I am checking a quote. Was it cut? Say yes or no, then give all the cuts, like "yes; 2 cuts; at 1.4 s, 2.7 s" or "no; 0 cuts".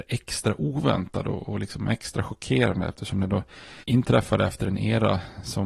yes; 1 cut; at 3.8 s